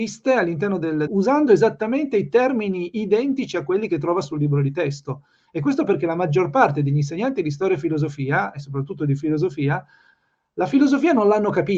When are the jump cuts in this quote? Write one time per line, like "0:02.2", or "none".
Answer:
0:01.1